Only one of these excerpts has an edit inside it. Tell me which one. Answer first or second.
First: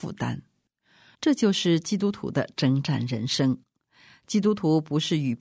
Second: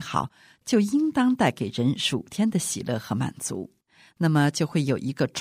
first